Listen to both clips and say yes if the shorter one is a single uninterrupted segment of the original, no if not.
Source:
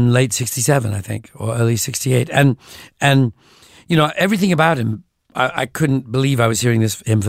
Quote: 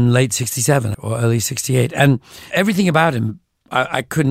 no